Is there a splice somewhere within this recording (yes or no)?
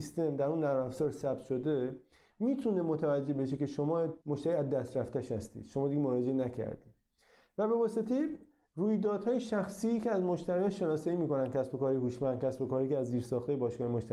yes